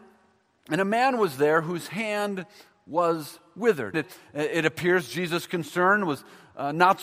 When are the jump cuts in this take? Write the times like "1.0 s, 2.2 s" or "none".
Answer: 3.9 s